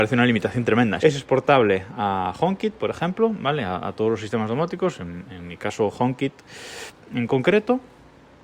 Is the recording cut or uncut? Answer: cut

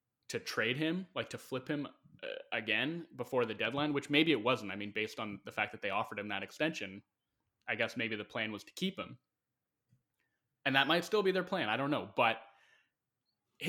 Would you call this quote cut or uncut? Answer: uncut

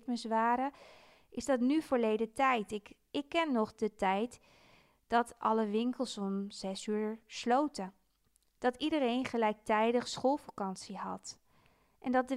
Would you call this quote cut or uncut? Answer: uncut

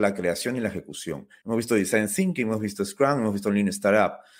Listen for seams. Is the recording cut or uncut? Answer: cut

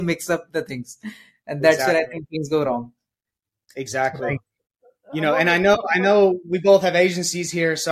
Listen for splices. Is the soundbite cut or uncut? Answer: uncut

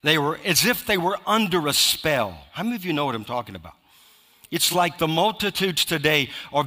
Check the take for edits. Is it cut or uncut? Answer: uncut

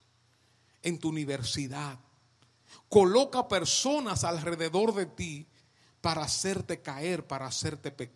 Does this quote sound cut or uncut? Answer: uncut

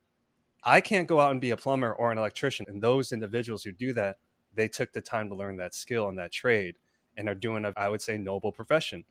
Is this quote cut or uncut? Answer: cut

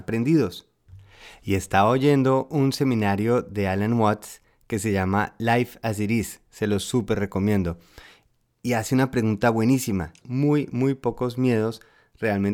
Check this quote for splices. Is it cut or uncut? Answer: cut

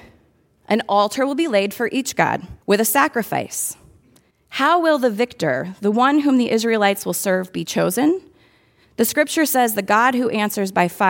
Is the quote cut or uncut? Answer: cut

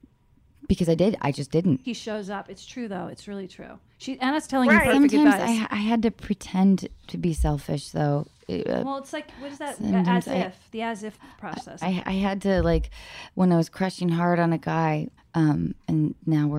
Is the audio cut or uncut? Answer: cut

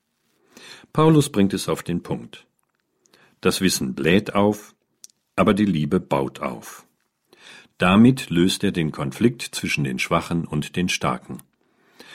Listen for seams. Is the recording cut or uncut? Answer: uncut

